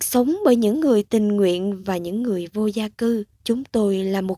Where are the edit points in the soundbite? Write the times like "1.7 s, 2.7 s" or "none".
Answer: 3.3 s

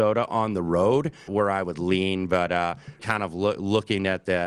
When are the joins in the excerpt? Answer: 1.3 s, 3.0 s

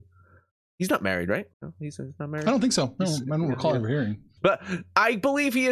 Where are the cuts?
1.5 s, 4.4 s

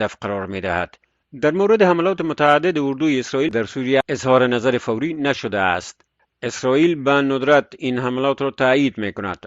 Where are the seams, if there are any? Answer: 1.2 s

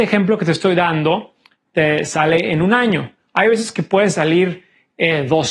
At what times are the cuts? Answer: none

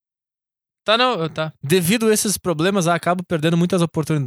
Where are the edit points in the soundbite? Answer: 1.6 s

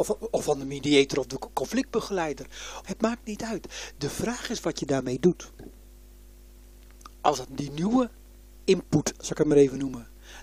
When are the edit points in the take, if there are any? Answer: 2.8 s

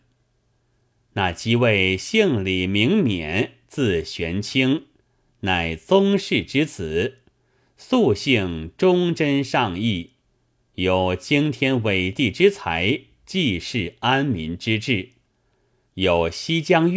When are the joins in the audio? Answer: 15.9 s

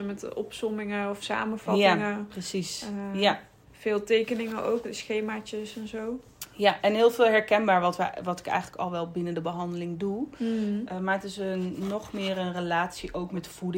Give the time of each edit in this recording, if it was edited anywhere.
4.8 s

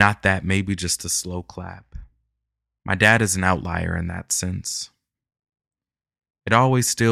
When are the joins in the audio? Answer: 2.8 s

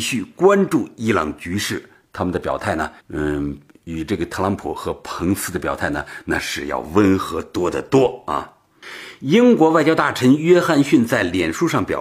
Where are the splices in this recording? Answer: 3.0 s

